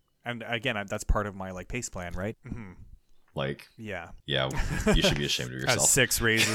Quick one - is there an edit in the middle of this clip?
yes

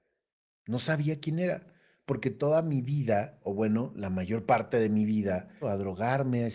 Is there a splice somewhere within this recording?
yes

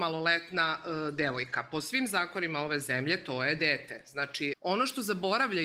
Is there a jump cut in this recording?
yes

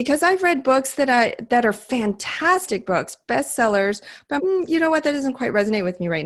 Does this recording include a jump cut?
yes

